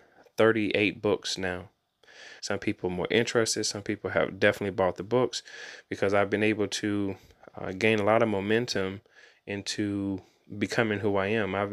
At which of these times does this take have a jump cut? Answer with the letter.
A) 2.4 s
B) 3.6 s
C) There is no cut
A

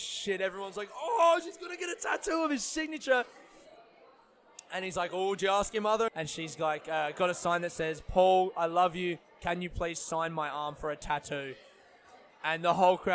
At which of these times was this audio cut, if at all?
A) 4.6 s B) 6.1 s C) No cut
B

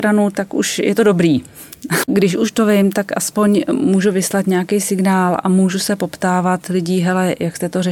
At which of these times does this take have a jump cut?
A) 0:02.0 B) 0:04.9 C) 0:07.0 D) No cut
A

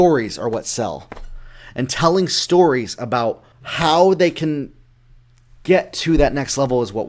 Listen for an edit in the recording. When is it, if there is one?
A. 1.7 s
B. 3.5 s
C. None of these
B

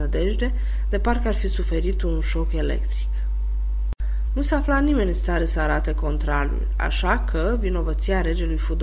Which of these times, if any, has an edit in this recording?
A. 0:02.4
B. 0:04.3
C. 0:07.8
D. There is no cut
B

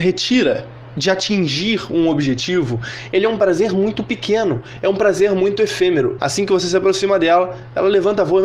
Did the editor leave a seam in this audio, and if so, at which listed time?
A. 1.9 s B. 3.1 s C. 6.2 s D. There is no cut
C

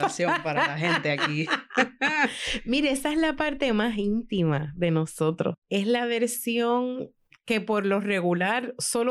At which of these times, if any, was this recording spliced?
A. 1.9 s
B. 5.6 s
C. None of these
B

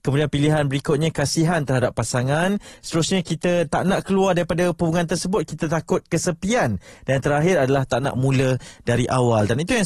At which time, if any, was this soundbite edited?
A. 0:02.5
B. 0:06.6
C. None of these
C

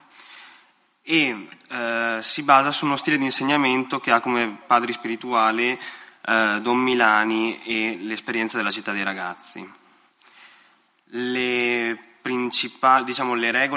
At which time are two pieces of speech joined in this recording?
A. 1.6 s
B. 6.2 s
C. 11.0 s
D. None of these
D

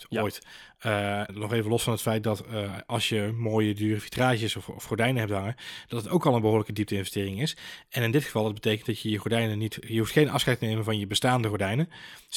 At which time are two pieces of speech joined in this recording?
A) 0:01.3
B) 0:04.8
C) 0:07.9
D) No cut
A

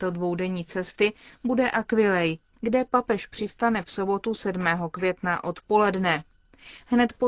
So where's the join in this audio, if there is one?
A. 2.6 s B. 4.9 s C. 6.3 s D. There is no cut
A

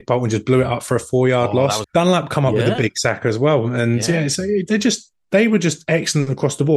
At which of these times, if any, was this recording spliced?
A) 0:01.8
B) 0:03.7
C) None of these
A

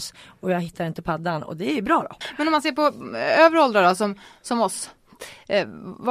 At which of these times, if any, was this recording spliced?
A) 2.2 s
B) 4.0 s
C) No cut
A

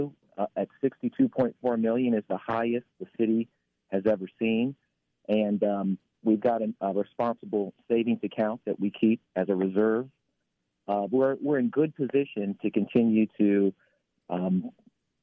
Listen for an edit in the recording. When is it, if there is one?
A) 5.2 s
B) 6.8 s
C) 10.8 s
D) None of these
B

